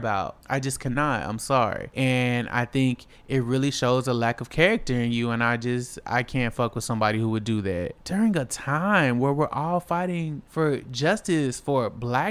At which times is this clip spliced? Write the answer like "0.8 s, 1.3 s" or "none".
none